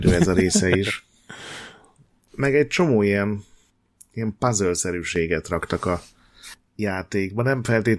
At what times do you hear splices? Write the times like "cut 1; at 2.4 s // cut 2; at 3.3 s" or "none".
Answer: none